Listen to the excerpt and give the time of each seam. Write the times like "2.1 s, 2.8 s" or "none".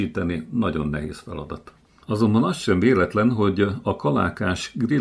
2.0 s